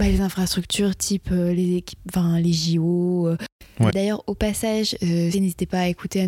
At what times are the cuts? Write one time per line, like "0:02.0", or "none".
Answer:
0:03.9
0:05.3